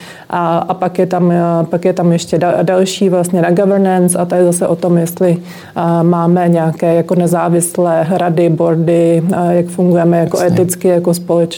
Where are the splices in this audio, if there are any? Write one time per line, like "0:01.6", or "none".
none